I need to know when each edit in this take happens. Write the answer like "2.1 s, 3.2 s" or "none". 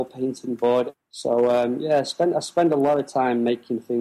0.9 s

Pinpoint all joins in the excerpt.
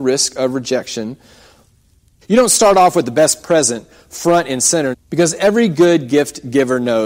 2.2 s, 4.9 s

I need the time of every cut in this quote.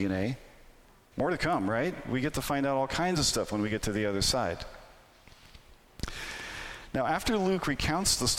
1.1 s

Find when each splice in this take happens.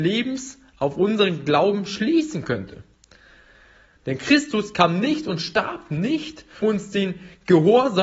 4.0 s, 6.6 s

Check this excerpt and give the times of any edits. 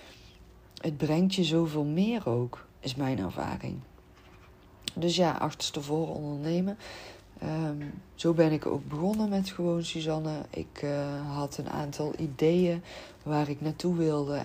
2.8 s

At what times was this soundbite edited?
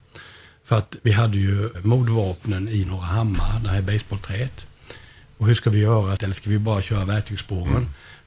1.7 s, 6.2 s

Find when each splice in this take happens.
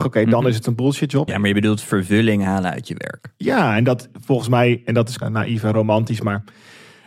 1.3 s, 5.2 s

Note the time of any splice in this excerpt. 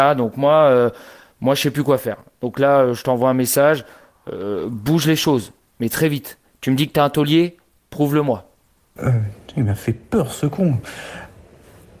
9.0 s

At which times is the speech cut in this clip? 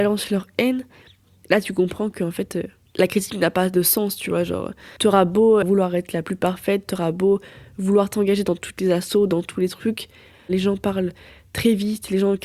5.6 s

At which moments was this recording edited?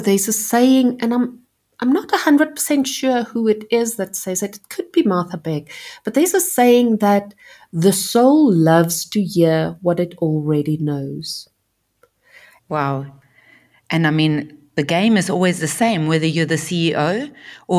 12.6 s

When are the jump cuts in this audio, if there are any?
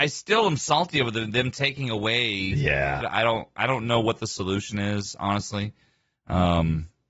3.0 s

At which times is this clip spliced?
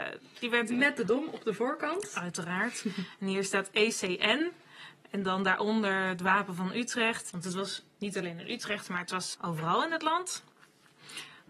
7.3 s, 9.3 s

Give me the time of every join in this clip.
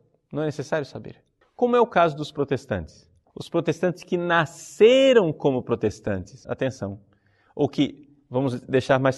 1.4 s, 3.3 s, 6.4 s

